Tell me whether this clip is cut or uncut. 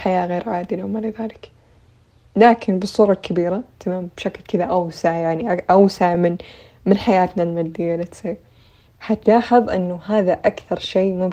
uncut